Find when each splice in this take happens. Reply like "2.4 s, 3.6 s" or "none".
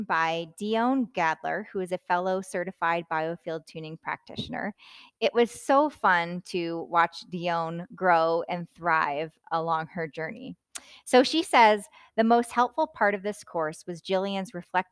none